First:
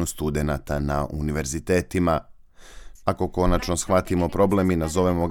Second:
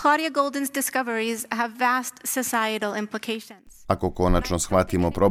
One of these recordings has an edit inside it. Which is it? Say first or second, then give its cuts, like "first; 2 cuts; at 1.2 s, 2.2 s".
first; 1 cut; at 3.0 s